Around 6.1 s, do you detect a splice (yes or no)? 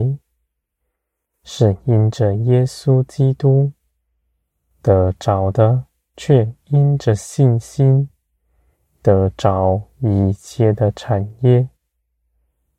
yes